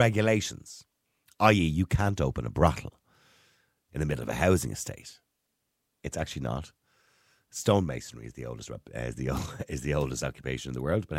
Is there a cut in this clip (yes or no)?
yes